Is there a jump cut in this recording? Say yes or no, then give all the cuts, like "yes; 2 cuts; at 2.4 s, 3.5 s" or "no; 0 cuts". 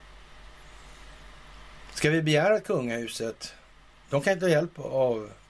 no; 0 cuts